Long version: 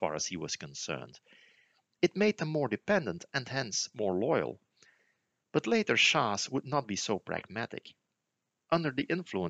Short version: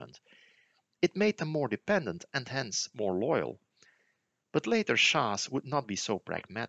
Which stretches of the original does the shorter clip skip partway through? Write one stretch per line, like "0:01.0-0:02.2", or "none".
none